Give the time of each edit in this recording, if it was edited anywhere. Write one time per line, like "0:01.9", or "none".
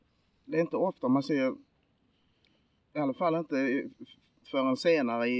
none